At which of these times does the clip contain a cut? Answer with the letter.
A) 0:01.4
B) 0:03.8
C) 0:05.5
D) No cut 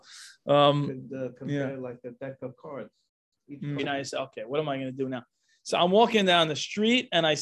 B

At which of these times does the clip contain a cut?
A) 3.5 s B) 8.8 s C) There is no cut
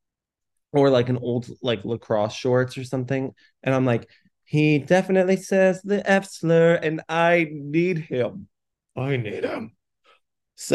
C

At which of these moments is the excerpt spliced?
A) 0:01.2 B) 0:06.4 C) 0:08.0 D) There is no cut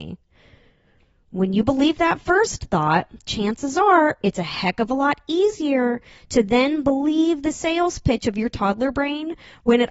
D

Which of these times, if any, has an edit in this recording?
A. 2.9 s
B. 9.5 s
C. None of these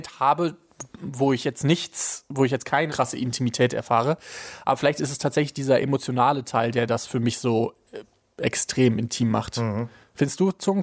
A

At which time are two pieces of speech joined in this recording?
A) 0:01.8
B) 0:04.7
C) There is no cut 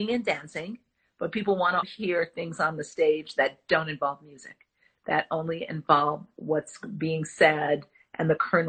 A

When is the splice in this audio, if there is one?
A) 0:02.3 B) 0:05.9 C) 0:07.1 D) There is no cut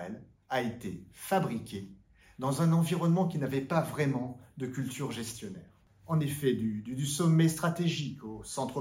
D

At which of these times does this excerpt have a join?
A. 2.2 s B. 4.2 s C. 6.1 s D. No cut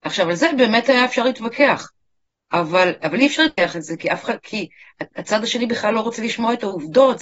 D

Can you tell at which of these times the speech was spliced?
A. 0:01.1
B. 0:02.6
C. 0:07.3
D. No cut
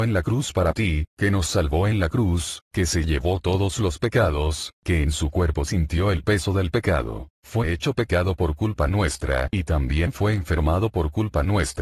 C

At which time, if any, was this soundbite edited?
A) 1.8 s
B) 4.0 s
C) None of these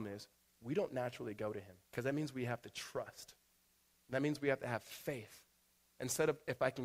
A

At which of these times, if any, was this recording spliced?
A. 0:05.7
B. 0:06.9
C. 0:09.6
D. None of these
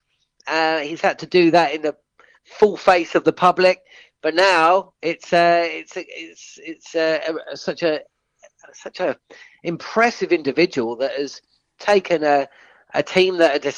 D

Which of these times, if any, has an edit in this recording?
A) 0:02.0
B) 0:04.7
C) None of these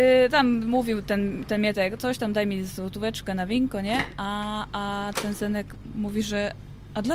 B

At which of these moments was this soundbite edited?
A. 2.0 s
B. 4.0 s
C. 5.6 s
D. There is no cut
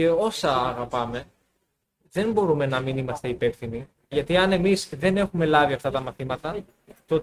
B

